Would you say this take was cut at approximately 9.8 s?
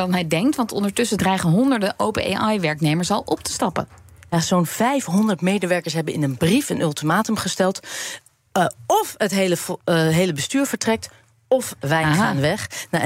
yes; 1 cut; at 9.8 s

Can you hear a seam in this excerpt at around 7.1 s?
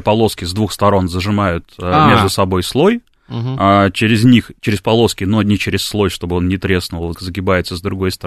yes; 1 cut; at 7.1 s

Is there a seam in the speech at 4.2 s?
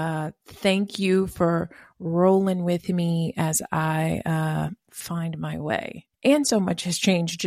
no; 1 cut; at 6.1 s

